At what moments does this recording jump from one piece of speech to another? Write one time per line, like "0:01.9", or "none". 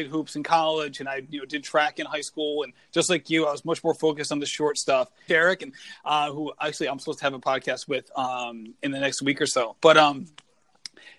0:05.3